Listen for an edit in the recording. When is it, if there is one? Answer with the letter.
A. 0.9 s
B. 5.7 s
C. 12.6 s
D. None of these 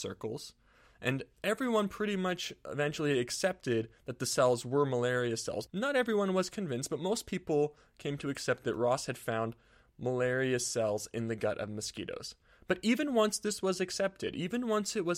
D